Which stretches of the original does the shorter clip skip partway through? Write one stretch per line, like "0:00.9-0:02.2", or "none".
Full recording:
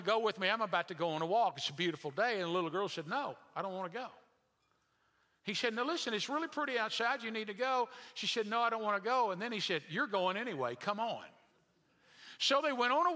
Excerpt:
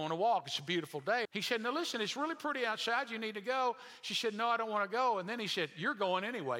0:02.4-0:05.4

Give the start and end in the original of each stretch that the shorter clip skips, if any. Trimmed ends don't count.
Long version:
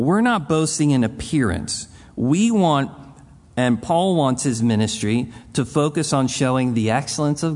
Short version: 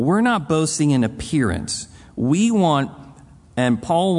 none

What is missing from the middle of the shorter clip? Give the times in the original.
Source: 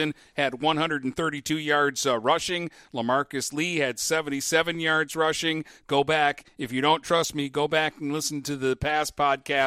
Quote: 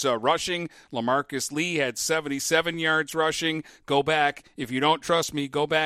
none

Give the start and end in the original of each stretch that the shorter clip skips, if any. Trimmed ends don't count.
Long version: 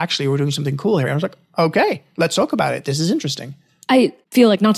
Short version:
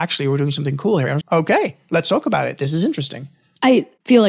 0:01.2-0:01.5

